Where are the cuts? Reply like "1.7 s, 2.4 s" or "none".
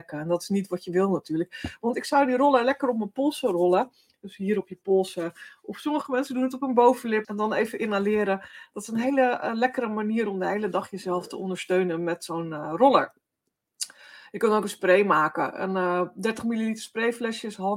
7.2 s